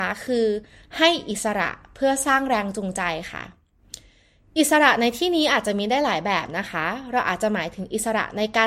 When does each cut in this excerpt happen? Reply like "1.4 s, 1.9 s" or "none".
none